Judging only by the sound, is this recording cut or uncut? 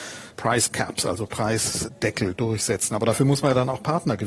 uncut